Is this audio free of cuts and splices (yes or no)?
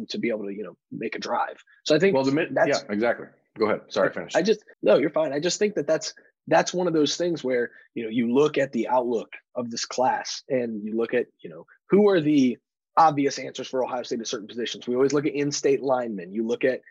no